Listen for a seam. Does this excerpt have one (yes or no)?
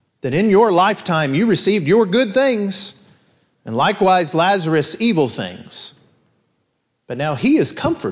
no